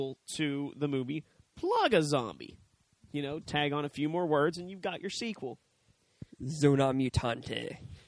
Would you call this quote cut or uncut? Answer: cut